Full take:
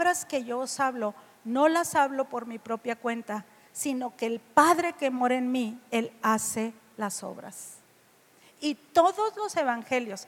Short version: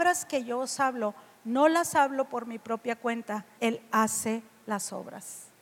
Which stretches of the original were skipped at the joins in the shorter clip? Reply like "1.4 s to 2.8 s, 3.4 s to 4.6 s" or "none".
3.6 s to 5.9 s